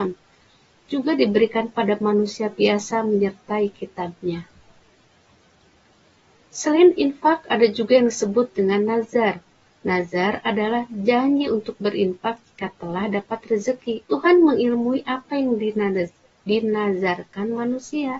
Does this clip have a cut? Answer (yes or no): yes